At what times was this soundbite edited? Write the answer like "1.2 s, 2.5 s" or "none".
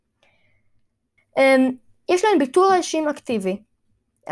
1.2 s